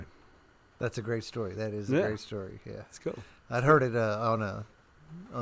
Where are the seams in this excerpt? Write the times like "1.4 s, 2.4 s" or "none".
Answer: none